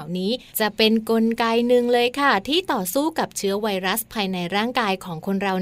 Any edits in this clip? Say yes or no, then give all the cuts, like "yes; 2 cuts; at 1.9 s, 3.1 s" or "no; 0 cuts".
no; 0 cuts